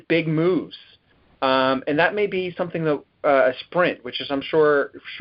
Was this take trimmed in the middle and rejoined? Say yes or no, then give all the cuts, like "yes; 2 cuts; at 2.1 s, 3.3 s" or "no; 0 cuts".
no; 0 cuts